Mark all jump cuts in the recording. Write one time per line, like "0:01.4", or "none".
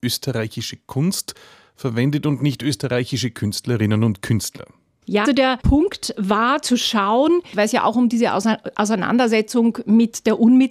0:05.2
0:07.5